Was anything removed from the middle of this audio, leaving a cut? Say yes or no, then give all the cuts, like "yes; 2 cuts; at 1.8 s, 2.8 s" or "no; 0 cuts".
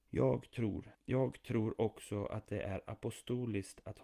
yes; 1 cut; at 0.9 s